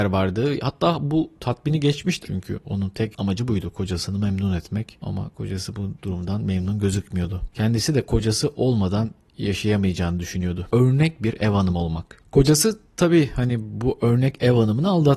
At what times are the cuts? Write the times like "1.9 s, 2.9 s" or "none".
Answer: 2.2 s, 10.7 s